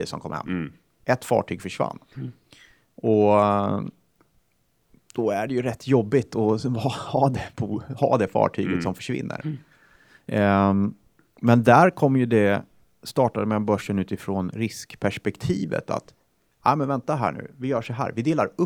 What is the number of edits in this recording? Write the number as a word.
zero